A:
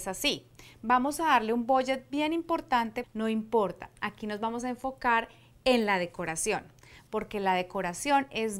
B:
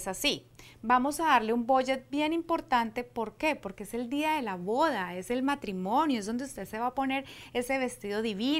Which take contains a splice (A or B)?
A